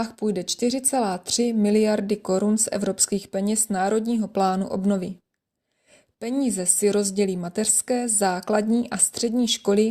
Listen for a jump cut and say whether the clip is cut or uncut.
uncut